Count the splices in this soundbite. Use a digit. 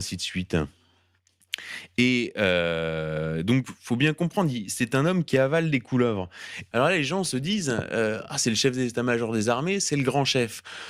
1